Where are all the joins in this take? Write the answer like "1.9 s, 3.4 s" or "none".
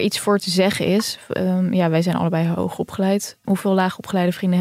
none